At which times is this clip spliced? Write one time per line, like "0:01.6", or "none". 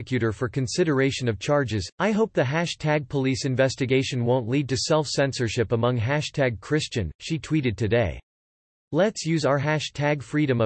0:01.9